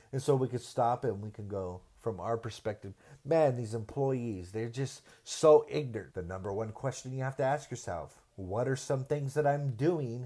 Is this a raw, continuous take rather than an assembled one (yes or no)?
no